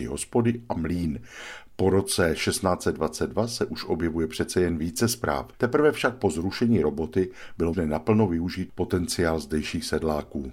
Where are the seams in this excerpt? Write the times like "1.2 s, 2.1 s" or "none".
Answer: 5.5 s, 7.7 s